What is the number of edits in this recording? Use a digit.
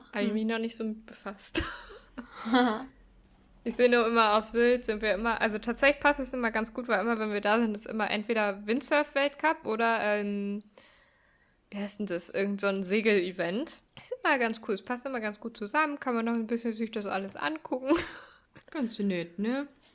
2